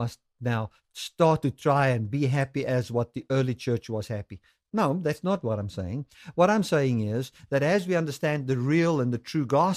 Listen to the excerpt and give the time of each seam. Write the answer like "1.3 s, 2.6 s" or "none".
none